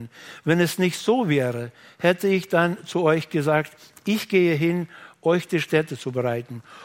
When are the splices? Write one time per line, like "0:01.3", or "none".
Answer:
none

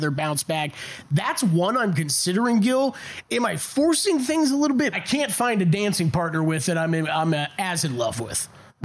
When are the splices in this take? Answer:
0:04.9

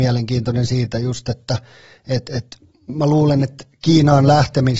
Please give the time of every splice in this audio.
0:02.9

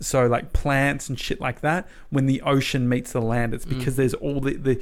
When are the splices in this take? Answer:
none

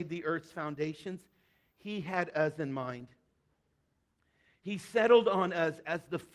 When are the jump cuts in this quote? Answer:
none

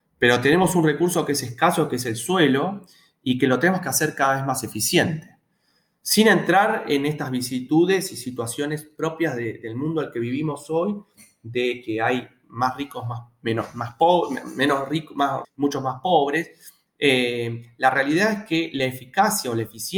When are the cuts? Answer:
0:15.4

